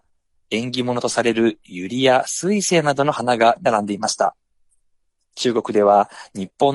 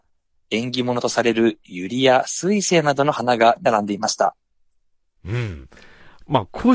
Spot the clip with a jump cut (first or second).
second